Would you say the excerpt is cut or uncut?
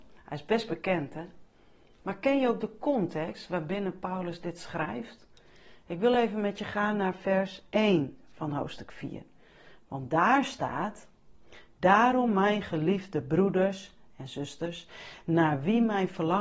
uncut